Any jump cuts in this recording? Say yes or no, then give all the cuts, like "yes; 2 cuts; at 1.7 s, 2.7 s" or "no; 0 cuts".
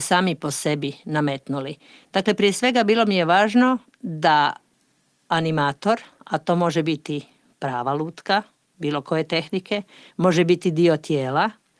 yes; 2 cuts; at 6.2 s, 10.1 s